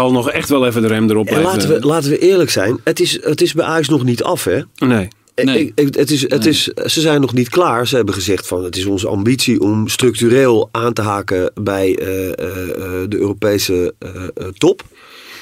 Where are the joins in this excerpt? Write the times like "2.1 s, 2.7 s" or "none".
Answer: none